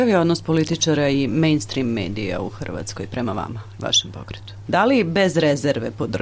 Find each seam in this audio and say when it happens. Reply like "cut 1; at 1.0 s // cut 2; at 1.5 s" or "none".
cut 1; at 4.6 s